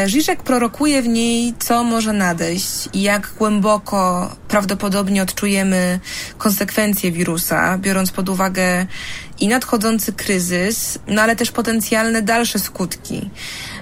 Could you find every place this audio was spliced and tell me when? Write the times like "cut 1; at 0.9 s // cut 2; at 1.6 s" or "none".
none